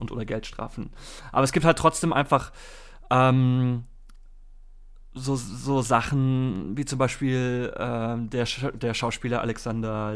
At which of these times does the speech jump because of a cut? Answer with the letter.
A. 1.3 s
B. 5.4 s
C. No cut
C